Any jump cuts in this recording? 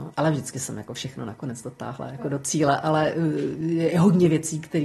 no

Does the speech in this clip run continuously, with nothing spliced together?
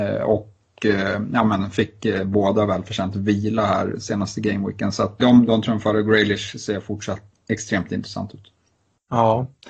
no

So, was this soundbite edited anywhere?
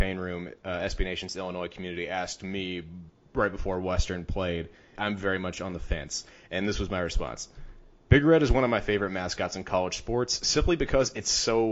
yes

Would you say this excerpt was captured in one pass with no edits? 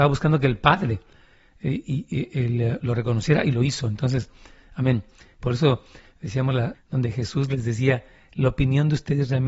no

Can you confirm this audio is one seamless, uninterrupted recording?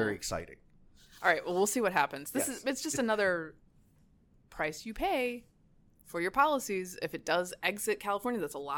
yes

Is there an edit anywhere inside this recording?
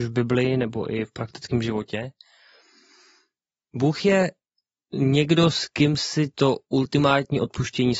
no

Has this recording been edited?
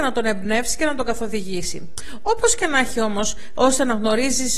yes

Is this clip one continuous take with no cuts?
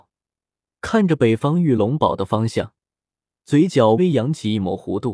no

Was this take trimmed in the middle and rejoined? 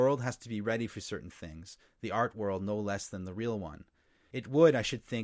yes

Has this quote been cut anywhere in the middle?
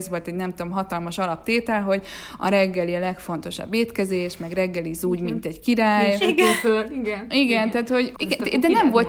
yes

